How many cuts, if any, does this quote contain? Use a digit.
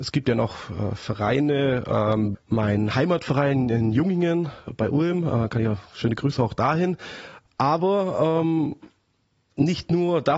2